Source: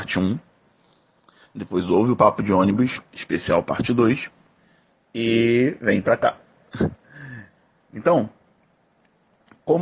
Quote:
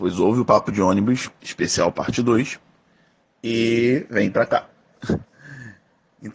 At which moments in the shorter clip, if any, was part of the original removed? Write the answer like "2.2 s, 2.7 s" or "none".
none